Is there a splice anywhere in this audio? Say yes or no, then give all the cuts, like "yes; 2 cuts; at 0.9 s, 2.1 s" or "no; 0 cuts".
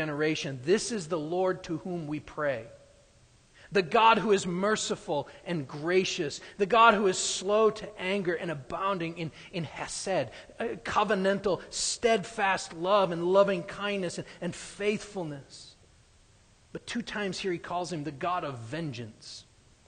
no; 0 cuts